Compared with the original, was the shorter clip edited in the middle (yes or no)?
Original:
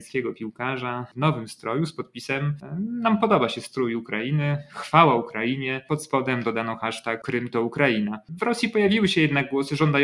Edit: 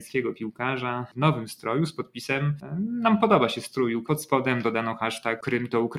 yes